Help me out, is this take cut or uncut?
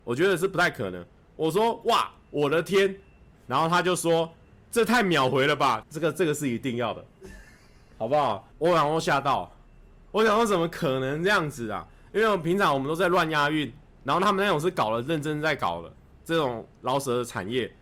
cut